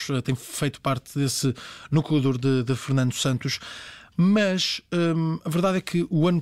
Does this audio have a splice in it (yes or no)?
no